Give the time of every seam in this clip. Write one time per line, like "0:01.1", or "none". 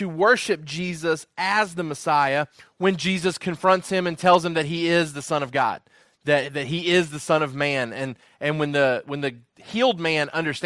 none